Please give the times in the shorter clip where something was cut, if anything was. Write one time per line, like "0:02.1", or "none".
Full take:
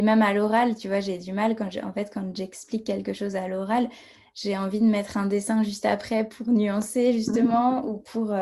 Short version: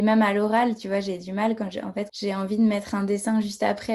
0:02.1